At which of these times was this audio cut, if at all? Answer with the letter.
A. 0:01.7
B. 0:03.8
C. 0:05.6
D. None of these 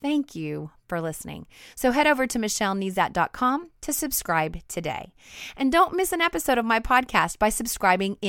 D